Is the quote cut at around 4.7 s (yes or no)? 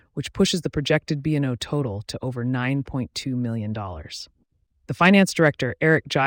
yes